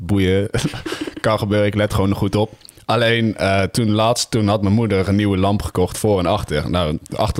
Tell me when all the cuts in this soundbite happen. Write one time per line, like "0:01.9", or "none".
none